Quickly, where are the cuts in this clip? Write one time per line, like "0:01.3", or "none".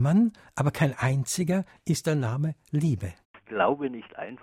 0:03.2